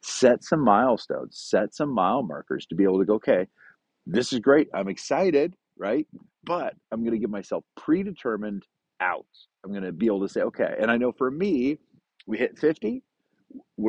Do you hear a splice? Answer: no; 0 cuts

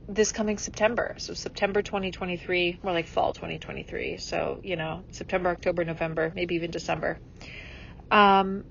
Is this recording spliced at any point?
no; 0 cuts

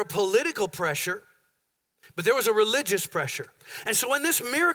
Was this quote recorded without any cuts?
yes; 0 cuts

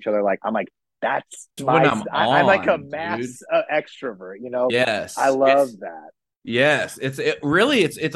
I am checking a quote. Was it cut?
yes; 2 cuts; at 1.6 s, 4.7 s

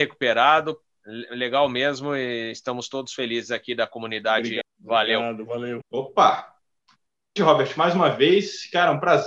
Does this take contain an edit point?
yes; 3 cuts; at 4.6 s, 5.8 s, 7.4 s

